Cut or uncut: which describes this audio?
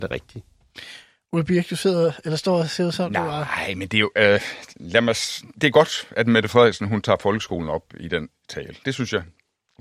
uncut